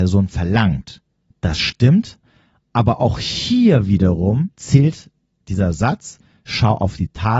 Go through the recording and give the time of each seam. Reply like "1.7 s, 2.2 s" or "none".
1.3 s, 4.5 s